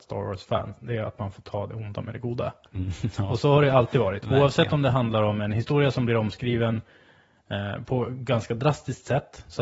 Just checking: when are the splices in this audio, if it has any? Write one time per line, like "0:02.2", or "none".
none